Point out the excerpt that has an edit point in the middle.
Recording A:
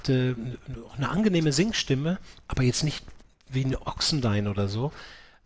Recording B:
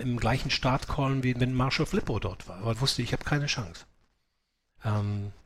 B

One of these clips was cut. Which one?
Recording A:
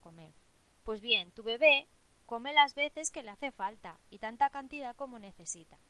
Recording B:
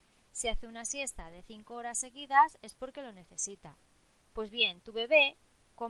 B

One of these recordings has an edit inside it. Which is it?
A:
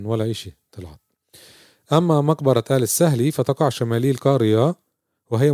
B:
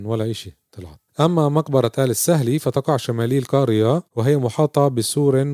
B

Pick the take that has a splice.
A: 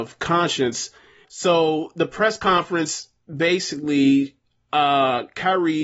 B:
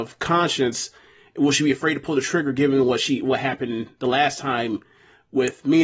A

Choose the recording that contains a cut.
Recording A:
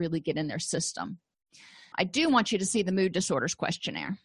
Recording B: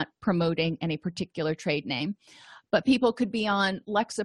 A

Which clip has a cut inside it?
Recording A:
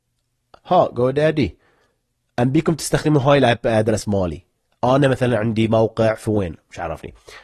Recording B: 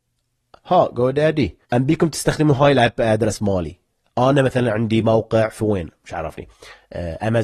B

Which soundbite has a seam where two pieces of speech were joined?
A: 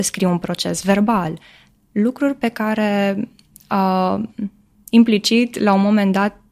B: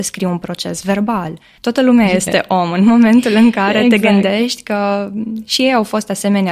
B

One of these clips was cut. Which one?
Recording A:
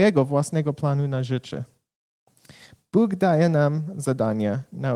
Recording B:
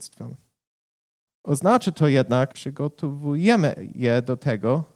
B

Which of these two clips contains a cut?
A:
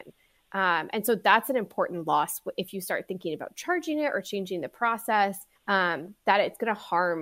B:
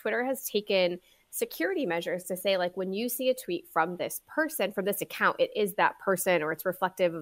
A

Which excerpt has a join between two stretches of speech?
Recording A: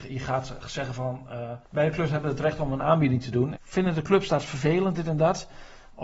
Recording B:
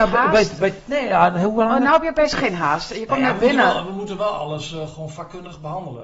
A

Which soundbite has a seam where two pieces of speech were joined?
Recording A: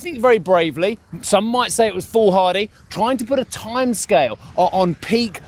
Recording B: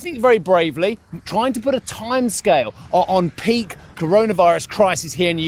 B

